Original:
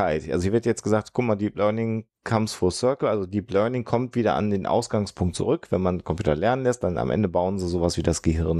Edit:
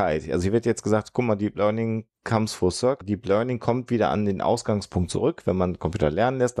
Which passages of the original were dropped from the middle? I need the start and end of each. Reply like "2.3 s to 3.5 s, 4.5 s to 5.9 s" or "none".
3.0 s to 3.3 s

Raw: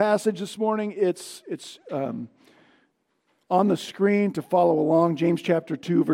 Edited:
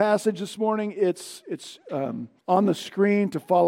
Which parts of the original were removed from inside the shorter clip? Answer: 2.4 s to 3.4 s

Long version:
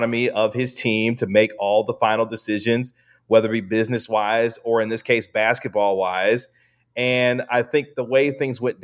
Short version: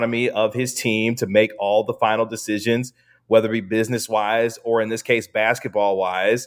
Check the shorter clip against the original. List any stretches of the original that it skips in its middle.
none

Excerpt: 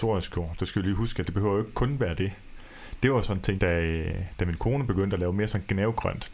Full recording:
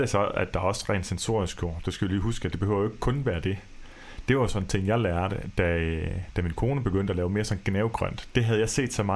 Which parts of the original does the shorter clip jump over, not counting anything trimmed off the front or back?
4.8 s to 5.5 s

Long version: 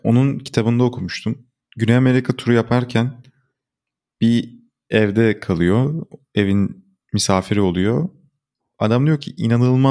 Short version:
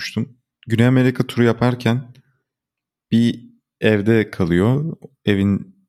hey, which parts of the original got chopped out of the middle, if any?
none

